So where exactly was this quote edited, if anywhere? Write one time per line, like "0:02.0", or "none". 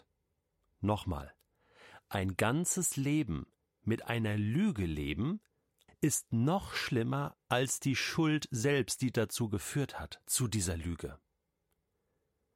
0:05.9